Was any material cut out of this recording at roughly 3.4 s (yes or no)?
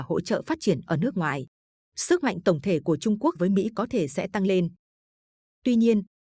yes